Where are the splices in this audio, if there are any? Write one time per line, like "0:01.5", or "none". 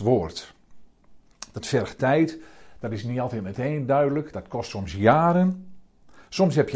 none

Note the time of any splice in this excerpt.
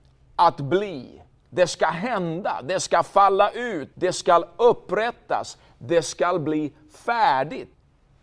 0:01.3
0:03.9

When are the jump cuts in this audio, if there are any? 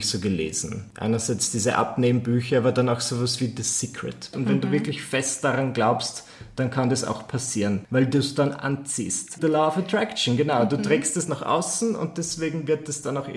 0:04.3
0:09.4

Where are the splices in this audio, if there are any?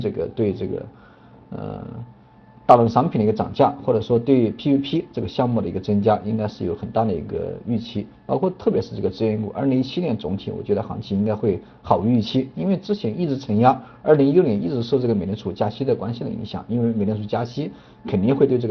none

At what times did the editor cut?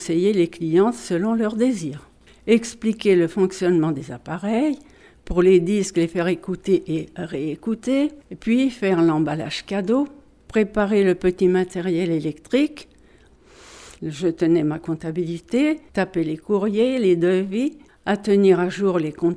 0:08.2
0:14.0
0:15.9

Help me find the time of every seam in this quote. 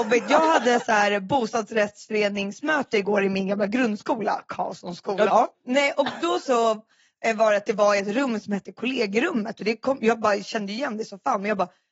0:05.3
0:06.4

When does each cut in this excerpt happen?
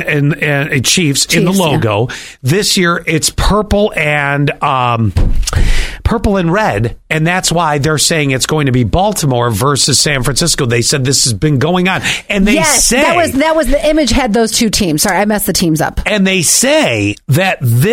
none

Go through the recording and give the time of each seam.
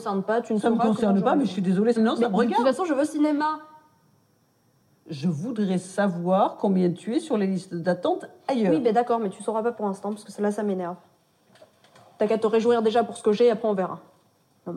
0:02.0

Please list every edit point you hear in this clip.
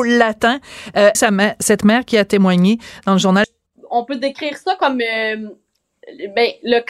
0:01.1
0:03.4

